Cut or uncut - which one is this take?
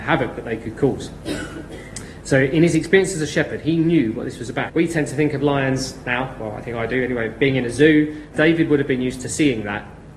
cut